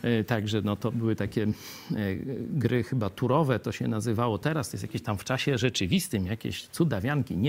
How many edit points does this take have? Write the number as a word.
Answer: zero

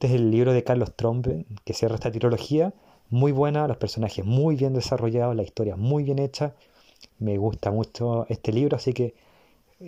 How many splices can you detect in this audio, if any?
zero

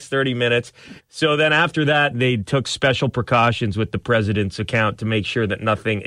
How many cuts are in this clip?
two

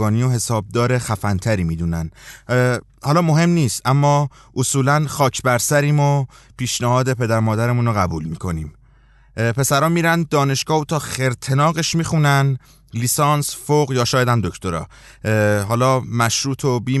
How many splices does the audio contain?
zero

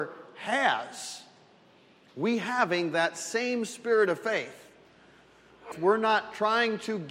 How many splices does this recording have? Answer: one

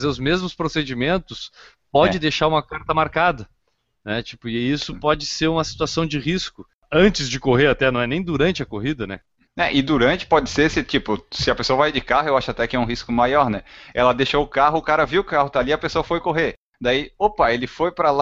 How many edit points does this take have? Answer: zero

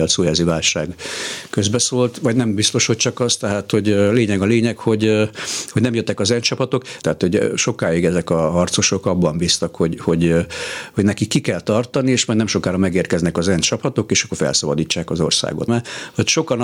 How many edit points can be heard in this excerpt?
two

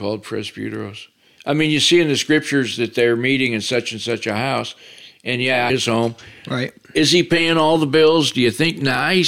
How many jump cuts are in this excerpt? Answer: two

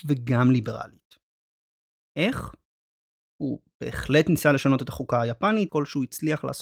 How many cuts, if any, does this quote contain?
two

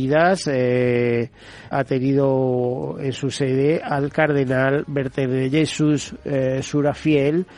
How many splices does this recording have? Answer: one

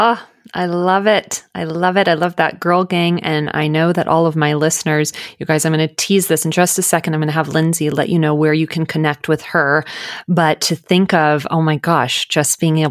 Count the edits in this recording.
zero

